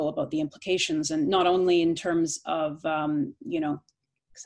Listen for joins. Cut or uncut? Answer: uncut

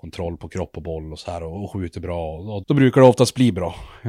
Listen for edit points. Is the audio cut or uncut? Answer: cut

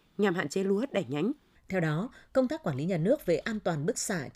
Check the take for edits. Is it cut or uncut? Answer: cut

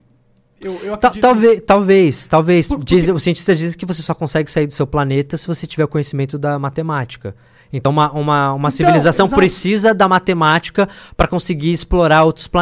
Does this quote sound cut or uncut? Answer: uncut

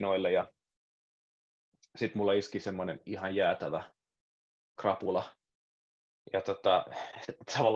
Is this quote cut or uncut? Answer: uncut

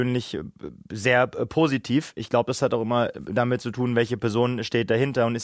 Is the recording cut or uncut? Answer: uncut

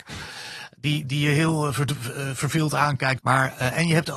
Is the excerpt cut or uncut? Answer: cut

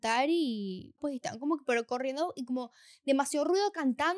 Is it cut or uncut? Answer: cut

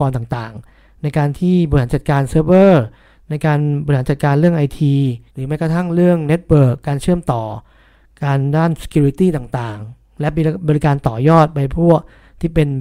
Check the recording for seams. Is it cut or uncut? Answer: cut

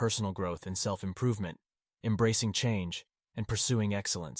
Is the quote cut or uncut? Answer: cut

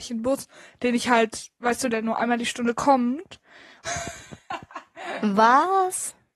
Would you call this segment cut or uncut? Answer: cut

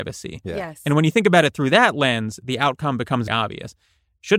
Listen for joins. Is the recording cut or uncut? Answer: cut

